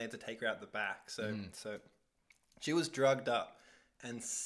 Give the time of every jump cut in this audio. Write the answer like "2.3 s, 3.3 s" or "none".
1.5 s